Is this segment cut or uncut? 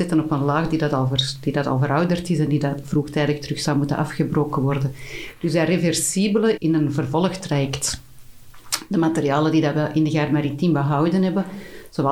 cut